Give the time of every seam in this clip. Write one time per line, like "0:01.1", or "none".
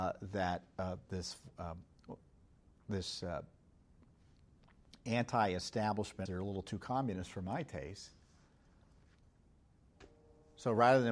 0:06.3